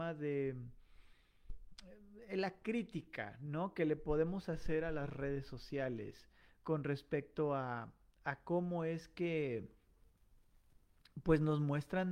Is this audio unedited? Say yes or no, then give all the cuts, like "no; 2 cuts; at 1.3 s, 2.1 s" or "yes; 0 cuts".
yes; 0 cuts